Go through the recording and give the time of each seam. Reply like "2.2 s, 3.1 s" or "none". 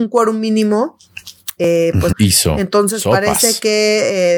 2.1 s